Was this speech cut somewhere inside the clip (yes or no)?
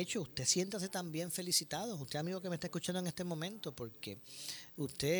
no